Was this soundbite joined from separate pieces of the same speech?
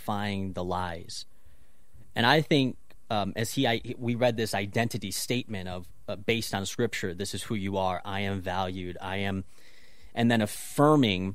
yes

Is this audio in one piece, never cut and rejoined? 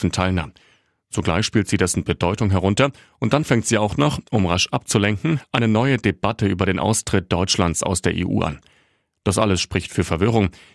yes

